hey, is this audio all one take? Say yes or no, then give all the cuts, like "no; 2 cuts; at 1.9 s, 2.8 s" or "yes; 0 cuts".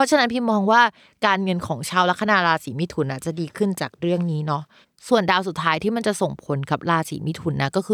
yes; 0 cuts